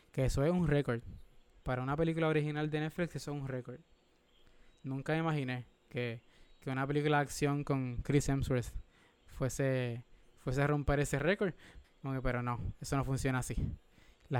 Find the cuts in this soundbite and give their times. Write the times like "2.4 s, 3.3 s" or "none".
11.8 s